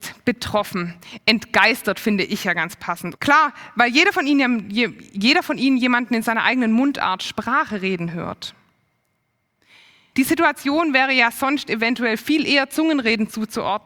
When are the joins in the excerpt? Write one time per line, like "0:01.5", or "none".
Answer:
0:03.1
0:10.1